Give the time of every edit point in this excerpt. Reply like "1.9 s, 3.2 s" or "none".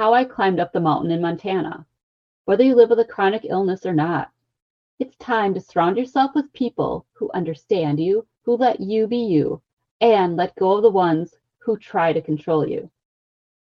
2.3 s, 8.3 s